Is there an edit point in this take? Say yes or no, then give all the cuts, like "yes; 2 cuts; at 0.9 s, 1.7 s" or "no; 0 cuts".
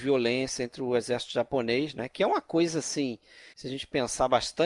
yes; 1 cut; at 3.5 s